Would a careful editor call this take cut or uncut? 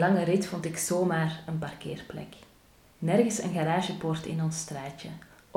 uncut